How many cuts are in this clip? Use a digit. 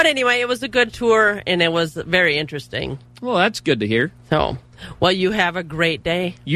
0